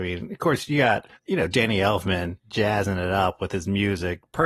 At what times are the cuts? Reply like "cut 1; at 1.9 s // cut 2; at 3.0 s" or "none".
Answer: cut 1; at 1.2 s // cut 2; at 2.4 s